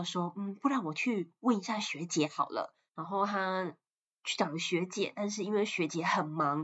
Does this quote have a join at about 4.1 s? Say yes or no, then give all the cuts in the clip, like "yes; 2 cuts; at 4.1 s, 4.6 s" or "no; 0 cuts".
no; 1 cut; at 2.9 s